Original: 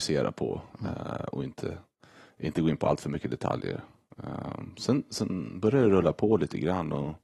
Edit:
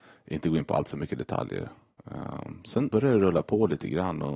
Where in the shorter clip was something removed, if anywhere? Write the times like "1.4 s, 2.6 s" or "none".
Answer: 2.9 s